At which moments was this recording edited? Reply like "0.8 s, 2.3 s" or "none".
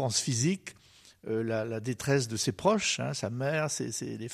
none